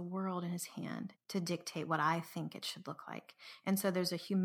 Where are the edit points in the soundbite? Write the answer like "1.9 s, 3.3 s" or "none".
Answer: 1.2 s

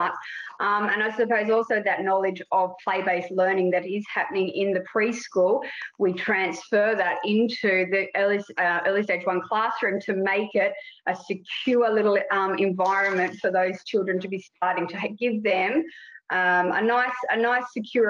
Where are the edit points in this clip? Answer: none

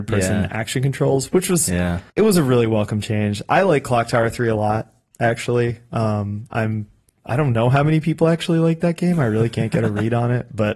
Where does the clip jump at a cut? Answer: 2.1 s

